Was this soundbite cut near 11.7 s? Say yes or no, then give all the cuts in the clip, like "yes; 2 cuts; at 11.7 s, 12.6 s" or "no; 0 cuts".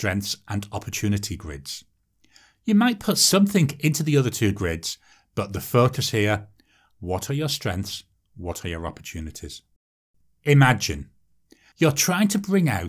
yes; 1 cut; at 11.7 s